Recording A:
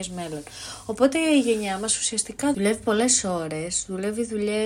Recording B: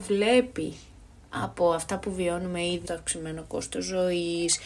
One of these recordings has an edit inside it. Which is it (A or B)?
B